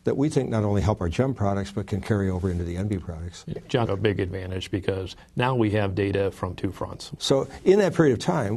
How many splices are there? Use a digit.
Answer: 2